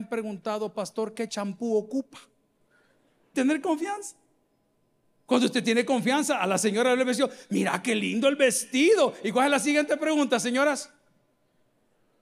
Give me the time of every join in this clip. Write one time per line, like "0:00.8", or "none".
0:03.3